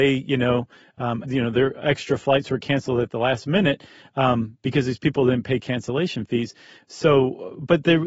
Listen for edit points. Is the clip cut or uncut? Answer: cut